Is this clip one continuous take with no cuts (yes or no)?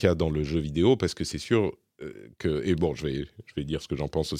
yes